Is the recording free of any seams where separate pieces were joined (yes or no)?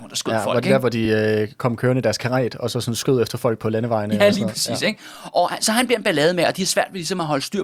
yes